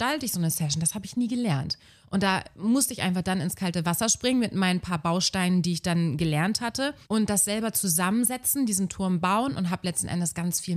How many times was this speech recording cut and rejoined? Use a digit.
1